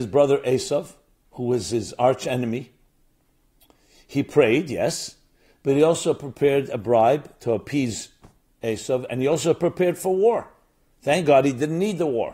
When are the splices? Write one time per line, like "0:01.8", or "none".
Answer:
none